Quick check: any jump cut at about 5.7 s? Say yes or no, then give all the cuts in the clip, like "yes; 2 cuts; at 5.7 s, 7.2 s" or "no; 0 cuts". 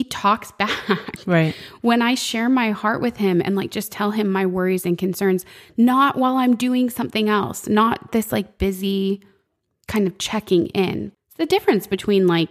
no; 0 cuts